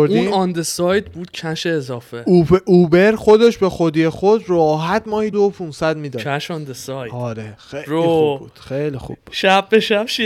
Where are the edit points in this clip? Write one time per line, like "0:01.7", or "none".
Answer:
0:05.3